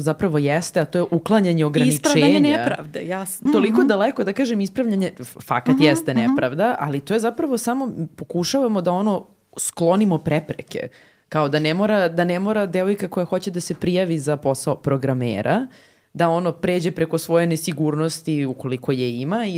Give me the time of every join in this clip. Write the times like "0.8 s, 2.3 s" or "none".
3.5 s